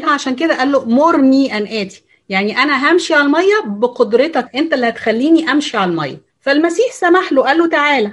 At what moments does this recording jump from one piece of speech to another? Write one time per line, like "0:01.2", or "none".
0:04.5
0:06.3